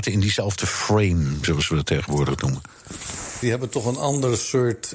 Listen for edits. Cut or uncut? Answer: cut